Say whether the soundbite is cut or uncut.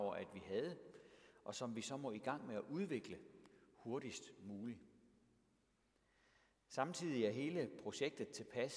uncut